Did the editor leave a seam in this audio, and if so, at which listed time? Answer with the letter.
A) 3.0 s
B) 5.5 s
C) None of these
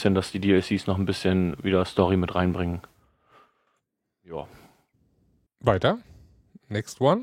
B